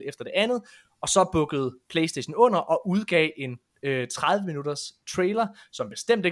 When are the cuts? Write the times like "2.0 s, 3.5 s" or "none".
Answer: none